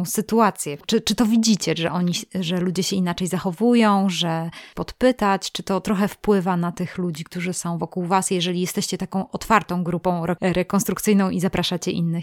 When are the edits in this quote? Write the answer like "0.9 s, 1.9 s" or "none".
4.7 s